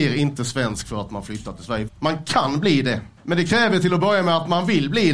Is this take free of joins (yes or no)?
no